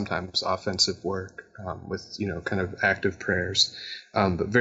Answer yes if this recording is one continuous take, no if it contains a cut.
yes